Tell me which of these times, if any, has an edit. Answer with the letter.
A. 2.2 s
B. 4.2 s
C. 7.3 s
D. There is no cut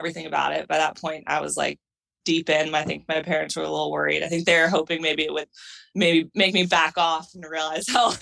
A